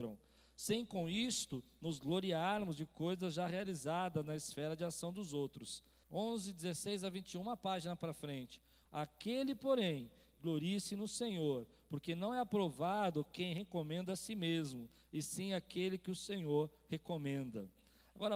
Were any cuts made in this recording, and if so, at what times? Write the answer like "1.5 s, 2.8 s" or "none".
6.0 s, 8.9 s, 10.3 s